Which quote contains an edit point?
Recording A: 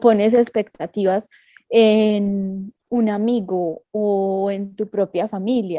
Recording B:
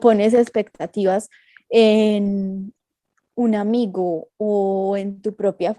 A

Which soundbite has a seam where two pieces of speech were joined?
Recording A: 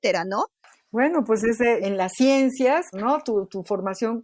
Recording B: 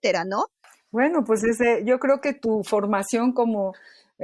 A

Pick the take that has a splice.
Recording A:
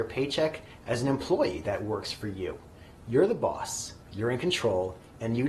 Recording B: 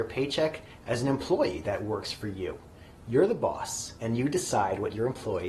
B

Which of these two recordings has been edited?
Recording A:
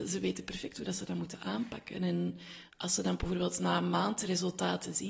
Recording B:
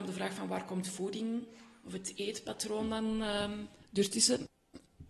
A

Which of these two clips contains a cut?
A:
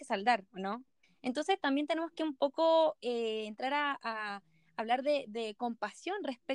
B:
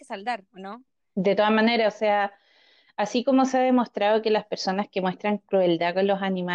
A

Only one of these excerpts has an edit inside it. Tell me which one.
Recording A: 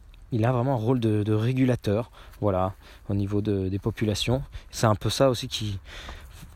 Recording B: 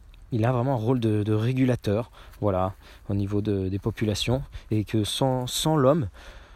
A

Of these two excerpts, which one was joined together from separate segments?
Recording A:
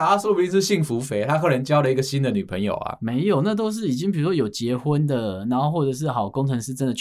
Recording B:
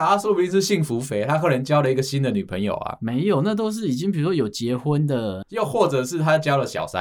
B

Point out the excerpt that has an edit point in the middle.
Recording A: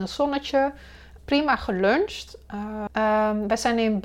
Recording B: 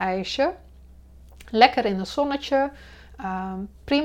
A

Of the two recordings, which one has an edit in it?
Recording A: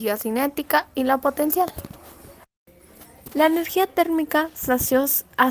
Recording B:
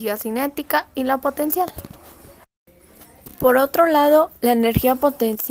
A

